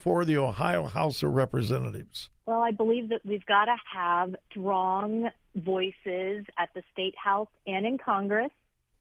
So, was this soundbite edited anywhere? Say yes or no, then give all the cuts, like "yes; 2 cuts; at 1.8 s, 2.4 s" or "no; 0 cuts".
yes; 2 cuts; at 2.4 s, 4.4 s